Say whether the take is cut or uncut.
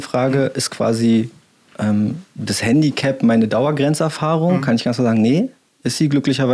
uncut